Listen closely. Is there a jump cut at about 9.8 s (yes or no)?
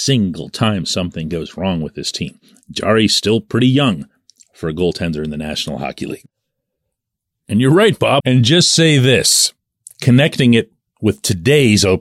no